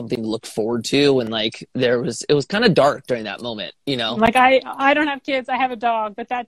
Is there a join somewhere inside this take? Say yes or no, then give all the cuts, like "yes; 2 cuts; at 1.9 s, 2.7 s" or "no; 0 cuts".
yes; 1 cut; at 4.2 s